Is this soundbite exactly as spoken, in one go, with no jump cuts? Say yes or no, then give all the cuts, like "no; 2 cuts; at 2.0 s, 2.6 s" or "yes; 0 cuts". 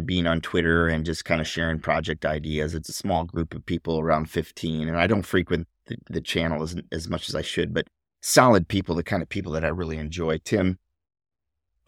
yes; 0 cuts